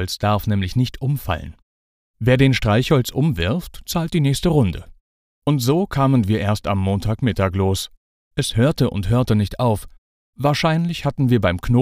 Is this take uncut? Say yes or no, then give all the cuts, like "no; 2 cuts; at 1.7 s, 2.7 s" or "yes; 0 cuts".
no; 3 cuts; at 2.1 s, 8.2 s, 10.1 s